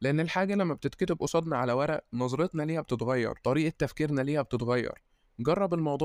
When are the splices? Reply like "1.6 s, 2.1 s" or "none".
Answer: 3.4 s